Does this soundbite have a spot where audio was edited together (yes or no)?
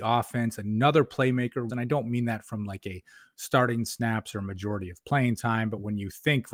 yes